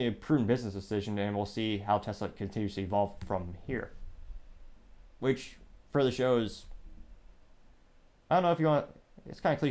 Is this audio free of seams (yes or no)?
no